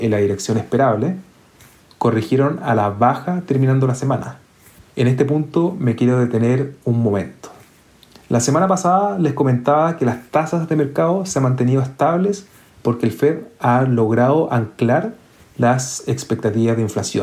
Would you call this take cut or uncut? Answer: uncut